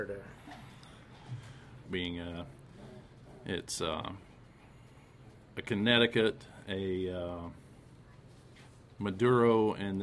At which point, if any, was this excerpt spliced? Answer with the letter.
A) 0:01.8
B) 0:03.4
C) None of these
A